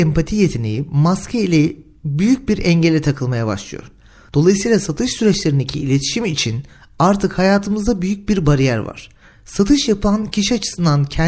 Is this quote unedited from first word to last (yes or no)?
yes